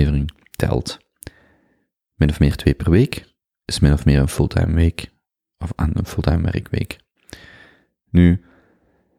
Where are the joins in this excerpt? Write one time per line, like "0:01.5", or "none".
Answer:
none